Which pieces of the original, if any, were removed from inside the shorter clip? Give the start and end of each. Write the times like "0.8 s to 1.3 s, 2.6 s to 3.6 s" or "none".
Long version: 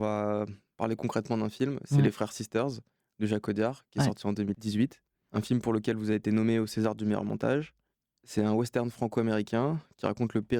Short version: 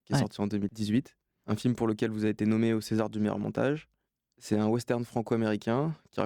none